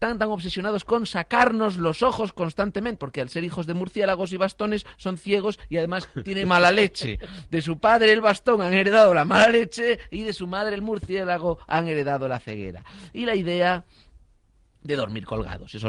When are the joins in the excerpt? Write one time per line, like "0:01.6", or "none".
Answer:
0:03.0
0:06.4